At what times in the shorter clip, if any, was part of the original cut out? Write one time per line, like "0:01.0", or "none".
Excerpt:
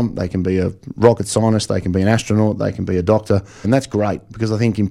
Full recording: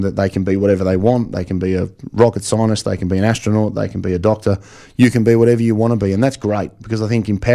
0:03.6